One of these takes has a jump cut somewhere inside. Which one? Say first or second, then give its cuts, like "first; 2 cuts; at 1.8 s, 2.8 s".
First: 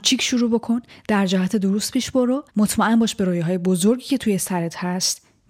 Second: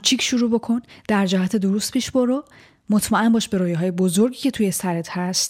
first; 1 cut; at 2.5 s